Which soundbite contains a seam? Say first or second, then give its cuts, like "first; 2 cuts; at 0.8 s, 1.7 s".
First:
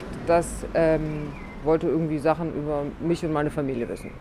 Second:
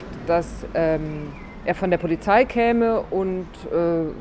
first; 1 cut; at 1.6 s